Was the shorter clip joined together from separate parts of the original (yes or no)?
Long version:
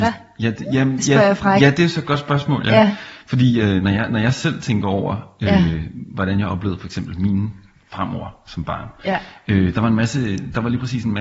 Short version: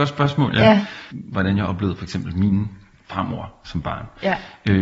yes